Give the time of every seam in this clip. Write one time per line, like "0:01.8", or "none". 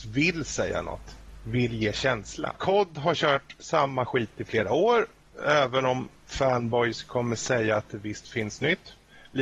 0:02.6